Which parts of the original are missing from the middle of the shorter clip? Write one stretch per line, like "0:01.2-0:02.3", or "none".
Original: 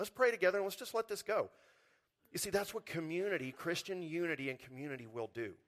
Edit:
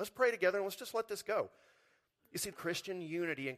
0:02.5-0:03.5